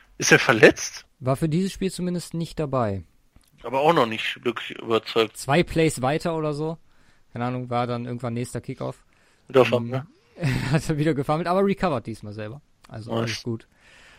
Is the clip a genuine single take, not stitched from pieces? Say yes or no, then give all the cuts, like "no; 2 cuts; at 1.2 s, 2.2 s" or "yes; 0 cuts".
no; 1 cut; at 5.3 s